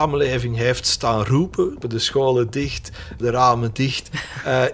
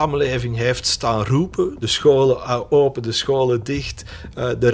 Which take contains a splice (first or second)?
first